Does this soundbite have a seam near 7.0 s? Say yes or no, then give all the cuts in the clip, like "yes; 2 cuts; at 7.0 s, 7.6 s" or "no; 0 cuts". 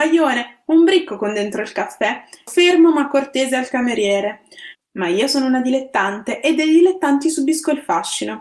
no; 2 cuts; at 2.5 s, 4.7 s